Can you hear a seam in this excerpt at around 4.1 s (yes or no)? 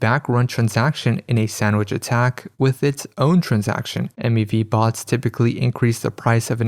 yes